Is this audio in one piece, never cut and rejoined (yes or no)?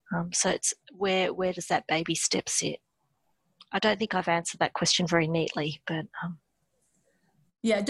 yes